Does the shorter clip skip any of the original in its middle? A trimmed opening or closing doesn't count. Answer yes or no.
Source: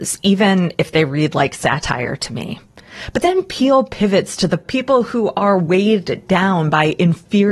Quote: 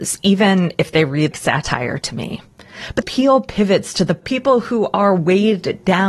yes